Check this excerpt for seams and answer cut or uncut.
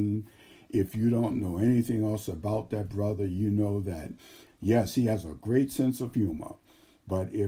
uncut